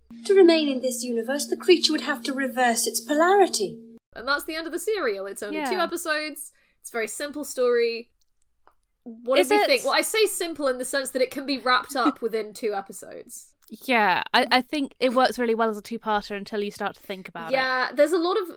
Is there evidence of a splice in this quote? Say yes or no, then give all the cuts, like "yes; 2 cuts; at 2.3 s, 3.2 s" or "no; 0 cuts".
yes; 1 cut; at 15.0 s